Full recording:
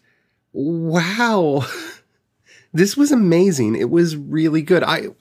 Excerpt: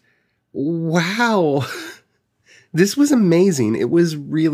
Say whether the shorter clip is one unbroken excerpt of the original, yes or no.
yes